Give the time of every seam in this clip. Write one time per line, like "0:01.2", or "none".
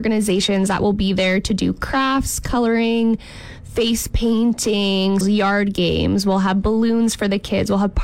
0:05.2

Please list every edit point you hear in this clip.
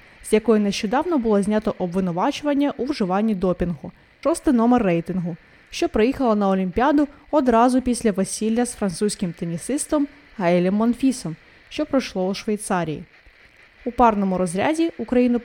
0:04.2

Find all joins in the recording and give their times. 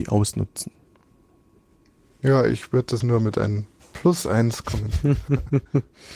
0:03.0

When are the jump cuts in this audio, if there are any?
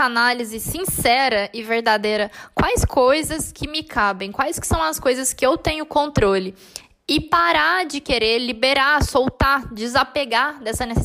none

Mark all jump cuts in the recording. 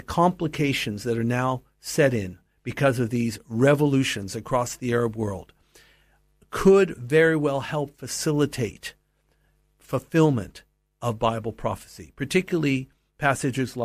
none

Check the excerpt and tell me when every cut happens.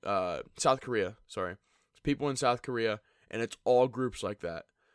none

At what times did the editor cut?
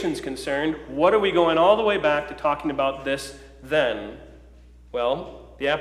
none

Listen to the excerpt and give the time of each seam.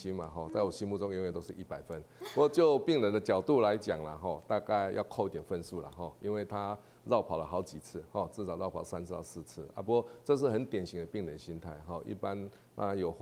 none

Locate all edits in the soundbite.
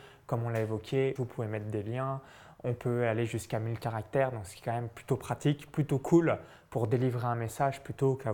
0:01.2

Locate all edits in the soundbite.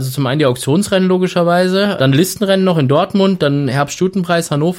0:02.0

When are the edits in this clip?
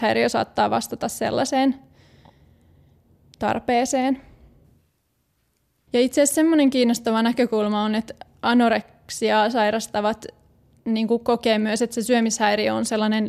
0:05.9

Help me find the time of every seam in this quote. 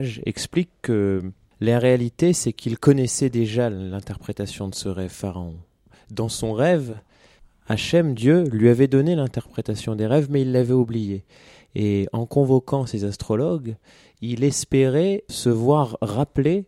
none

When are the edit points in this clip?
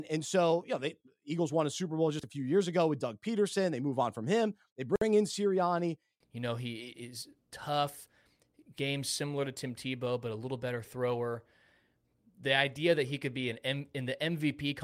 0:06.2

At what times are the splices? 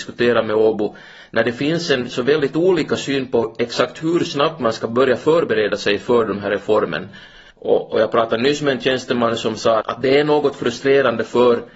0:07.5
0:09.8

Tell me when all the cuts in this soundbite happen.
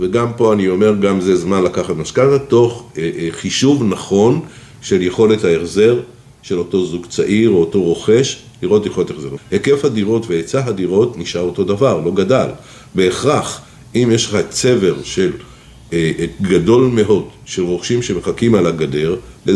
0:09.4

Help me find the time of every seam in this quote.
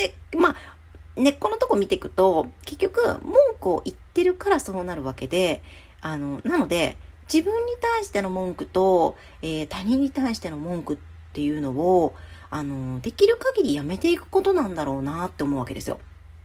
none

